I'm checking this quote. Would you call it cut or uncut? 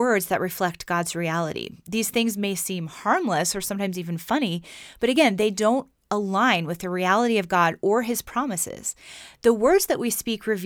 uncut